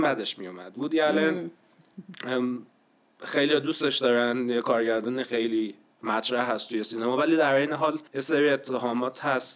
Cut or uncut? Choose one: cut